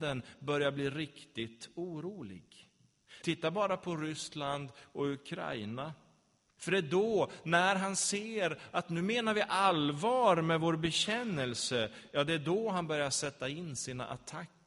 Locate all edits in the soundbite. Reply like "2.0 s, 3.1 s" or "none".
3.2 s, 6.6 s